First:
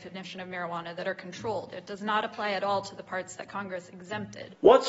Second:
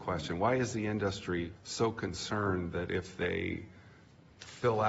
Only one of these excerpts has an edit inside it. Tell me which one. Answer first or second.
second